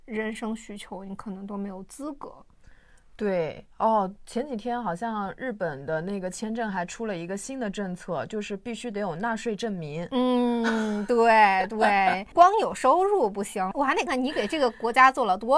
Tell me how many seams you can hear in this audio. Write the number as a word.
one